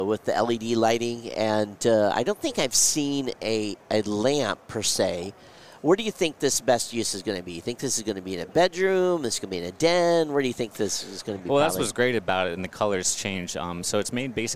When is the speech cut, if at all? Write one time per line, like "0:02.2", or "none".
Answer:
none